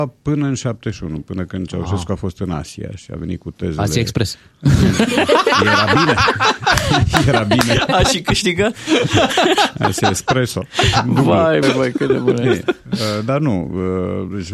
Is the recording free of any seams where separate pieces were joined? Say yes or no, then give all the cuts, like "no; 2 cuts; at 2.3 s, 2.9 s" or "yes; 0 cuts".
no; 1 cut; at 11.6 s